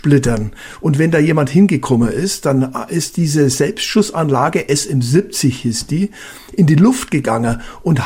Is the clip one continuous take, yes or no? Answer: yes